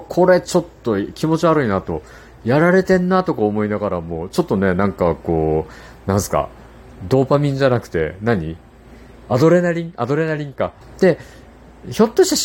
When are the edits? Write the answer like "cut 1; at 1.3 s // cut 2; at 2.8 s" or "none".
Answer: cut 1; at 10.8 s